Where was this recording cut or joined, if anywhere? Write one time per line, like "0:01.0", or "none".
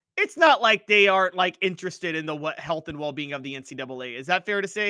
none

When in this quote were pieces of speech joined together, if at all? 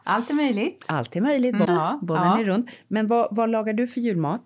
0:01.6

